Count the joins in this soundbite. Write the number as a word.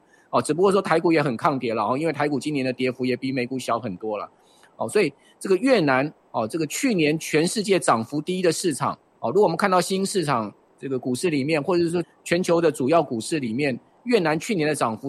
one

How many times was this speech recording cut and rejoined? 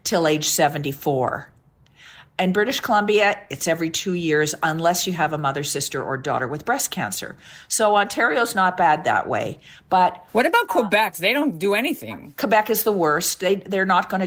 one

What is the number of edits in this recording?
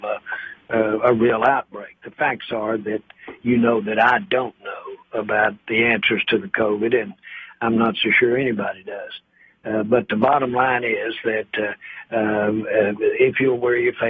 zero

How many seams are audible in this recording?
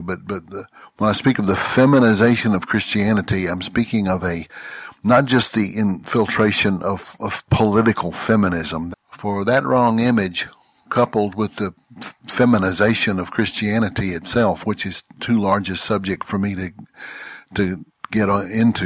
one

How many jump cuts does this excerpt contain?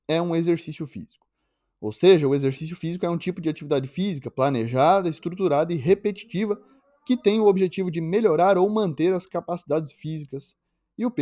zero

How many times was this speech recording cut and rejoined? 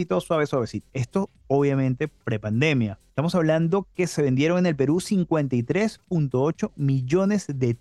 one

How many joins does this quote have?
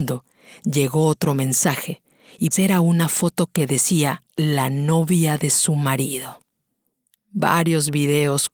three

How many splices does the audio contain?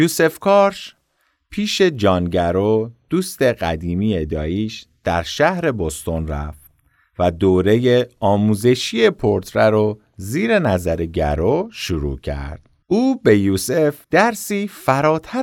two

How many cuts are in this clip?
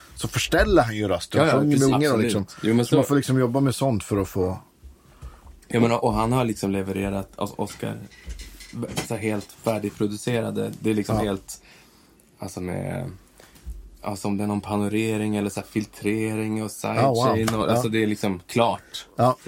one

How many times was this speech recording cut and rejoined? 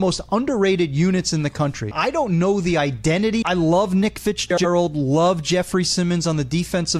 two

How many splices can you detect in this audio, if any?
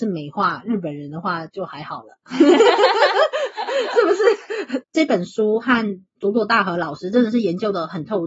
one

